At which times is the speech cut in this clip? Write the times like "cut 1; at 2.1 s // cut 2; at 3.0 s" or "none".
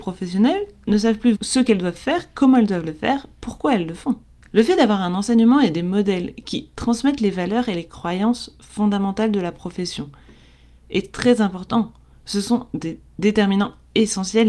cut 1; at 1.3 s